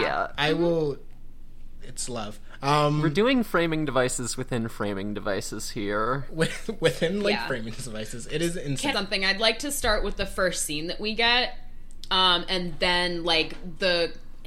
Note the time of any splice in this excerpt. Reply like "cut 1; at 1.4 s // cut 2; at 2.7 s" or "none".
cut 1; at 8.9 s